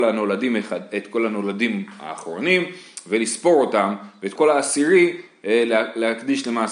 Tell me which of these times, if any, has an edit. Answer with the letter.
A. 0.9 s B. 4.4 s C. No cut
B